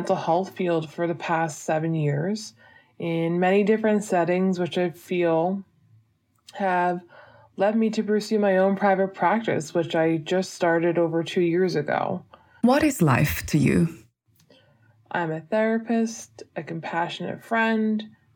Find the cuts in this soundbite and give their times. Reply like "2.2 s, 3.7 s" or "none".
12.6 s, 14.9 s